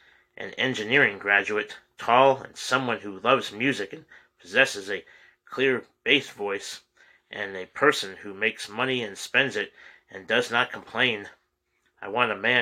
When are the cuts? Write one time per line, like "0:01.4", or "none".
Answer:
none